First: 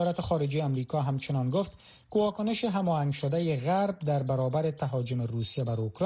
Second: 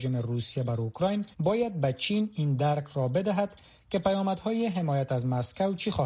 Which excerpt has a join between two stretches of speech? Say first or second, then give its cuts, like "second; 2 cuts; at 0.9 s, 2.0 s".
second; 1 cut; at 1.3 s